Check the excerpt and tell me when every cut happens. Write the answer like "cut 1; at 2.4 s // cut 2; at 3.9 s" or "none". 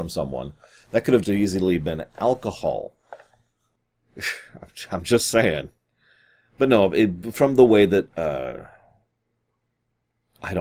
cut 1; at 1.2 s // cut 2; at 3.8 s